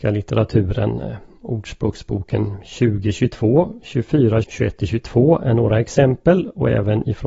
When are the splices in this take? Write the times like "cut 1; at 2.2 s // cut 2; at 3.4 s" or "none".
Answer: cut 1; at 4.4 s